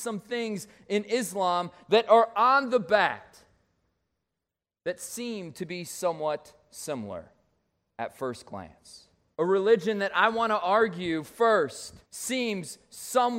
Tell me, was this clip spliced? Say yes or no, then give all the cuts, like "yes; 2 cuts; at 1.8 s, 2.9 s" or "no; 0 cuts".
yes; 2 cuts; at 9.3 s, 12.0 s